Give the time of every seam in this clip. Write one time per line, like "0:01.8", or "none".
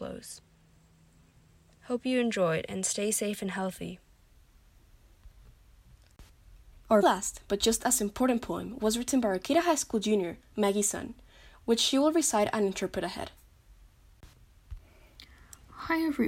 0:07.0